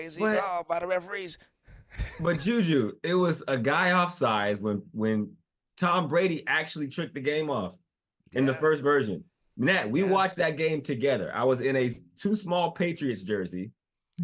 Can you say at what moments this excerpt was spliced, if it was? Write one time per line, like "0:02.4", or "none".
none